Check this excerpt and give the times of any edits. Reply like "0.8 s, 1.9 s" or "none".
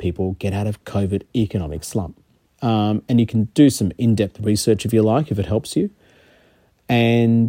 2.4 s

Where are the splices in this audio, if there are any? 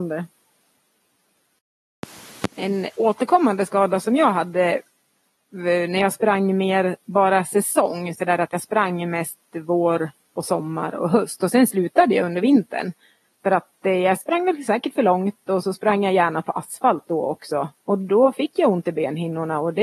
13.2 s

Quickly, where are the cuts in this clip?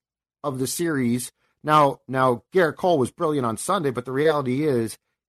none

